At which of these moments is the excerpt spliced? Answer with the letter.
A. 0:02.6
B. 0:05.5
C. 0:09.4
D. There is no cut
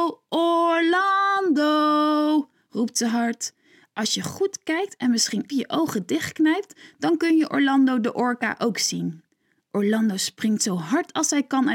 B